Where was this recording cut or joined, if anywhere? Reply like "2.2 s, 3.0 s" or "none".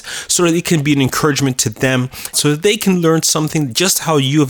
2.3 s